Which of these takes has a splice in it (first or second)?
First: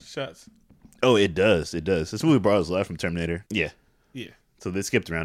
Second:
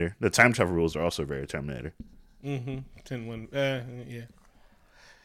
first